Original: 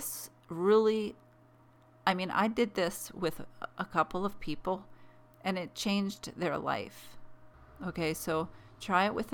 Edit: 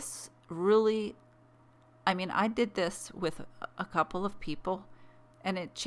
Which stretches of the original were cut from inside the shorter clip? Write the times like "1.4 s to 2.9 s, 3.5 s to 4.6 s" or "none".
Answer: none